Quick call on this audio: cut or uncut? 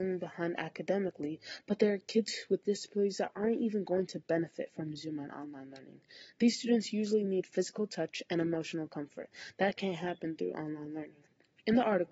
uncut